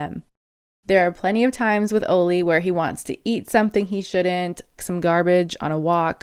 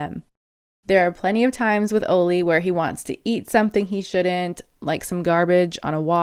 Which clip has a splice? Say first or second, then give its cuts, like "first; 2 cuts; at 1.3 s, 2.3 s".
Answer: first; 1 cut; at 4.8 s